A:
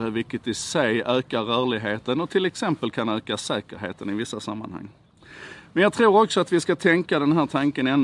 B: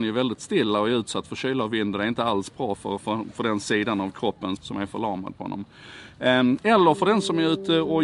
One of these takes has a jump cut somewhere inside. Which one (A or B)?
B